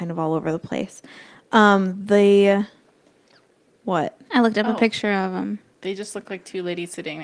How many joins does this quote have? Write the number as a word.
zero